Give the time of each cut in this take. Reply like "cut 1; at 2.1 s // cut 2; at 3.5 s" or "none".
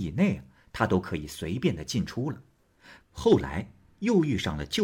cut 1; at 3.0 s

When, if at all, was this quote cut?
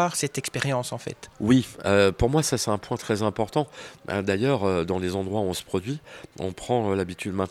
none

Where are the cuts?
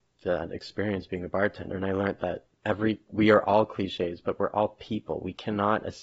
cut 1; at 2.6 s

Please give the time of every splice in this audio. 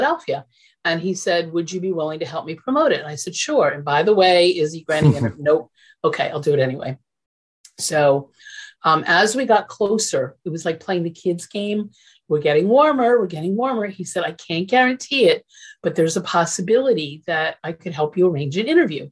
none

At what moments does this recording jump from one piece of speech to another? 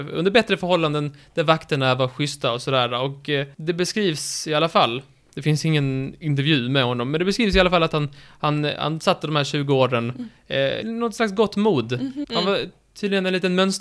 cut 1; at 3.5 s // cut 2; at 10.8 s // cut 3; at 12.2 s

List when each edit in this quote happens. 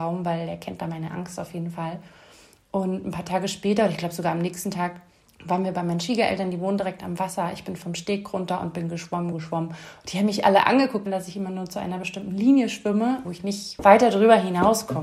cut 1; at 9.3 s // cut 2; at 11.1 s // cut 3; at 13.2 s

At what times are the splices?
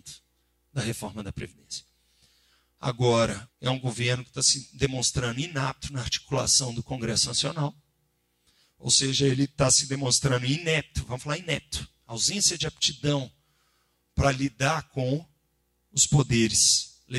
cut 1; at 3.5 s

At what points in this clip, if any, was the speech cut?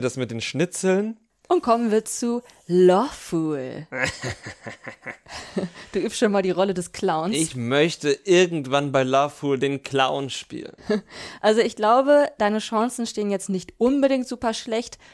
none

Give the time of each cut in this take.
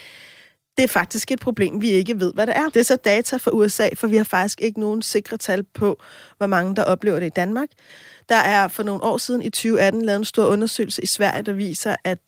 cut 1; at 2.7 s

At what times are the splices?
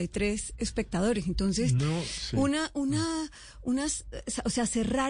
none

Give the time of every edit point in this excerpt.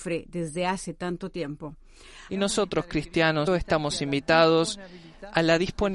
cut 1; at 2.3 s // cut 2; at 3.5 s

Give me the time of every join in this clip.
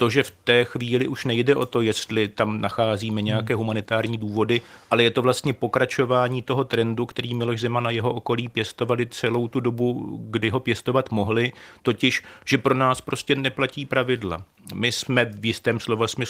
none

